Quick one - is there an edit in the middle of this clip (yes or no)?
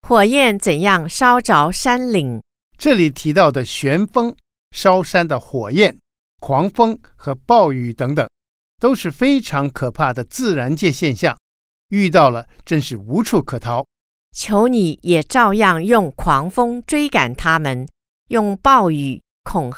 yes